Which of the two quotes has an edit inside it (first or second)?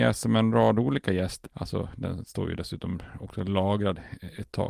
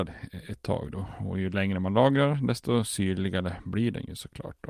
first